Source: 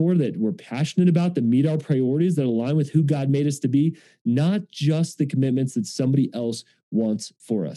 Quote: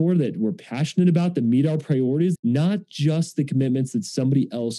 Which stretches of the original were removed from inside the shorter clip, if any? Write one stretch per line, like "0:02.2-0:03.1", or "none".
0:02.3-0:04.2